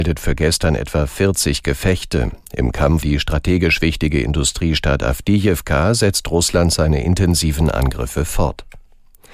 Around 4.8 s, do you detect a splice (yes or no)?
no